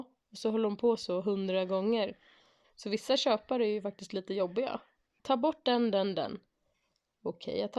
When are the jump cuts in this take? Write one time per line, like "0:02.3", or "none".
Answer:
0:02.6
0:05.2